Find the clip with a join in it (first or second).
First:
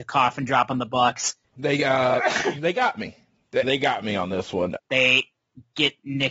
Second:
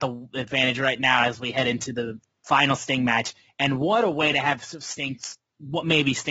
first